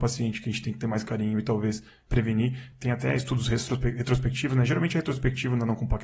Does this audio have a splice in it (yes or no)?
no